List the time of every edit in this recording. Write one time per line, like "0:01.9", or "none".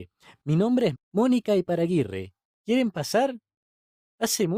0:00.9
0:02.5